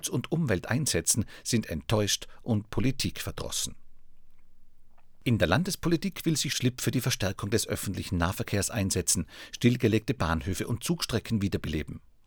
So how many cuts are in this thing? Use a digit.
0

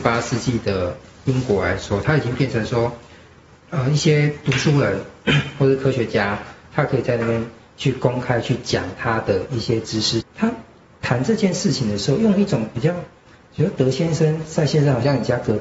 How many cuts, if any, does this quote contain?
1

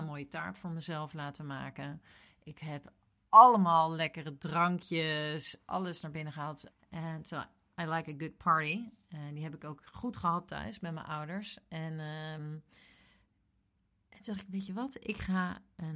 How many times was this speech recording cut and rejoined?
1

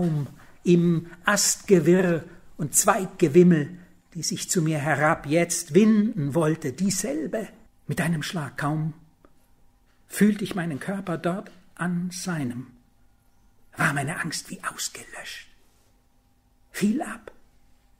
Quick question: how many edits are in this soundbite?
1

